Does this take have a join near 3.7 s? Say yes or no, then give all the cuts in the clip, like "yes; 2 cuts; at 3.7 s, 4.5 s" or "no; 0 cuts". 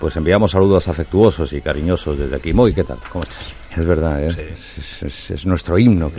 yes; 1 cut; at 3.7 s